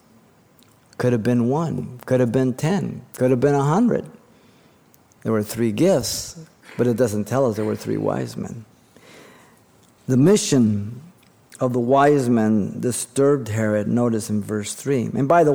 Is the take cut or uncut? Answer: uncut